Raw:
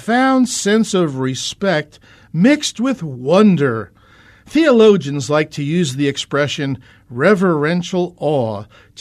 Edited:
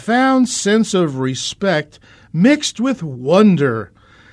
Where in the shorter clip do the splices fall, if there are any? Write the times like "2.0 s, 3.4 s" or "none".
none